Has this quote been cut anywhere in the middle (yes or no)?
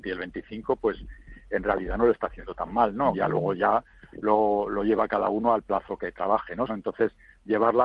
yes